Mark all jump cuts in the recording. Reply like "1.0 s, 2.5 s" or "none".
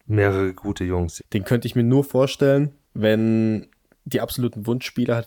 1.2 s, 2.9 s